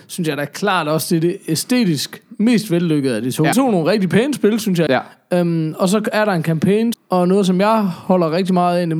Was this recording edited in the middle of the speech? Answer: yes; 3 cuts; at 3.5 s, 4.9 s, 6.9 s

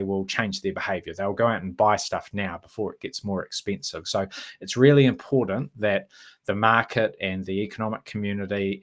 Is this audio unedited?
no; 1 cut; at 4.0 s

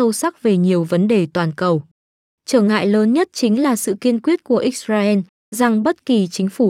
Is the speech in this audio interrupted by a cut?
yes; 1 cut; at 2.3 s

